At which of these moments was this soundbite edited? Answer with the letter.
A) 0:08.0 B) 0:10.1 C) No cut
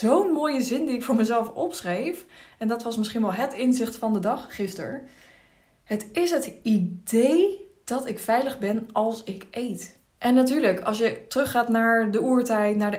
B